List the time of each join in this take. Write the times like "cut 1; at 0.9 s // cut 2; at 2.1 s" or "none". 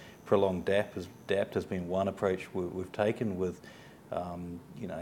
none